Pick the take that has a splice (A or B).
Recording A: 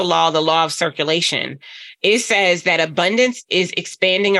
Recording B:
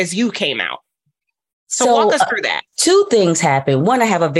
B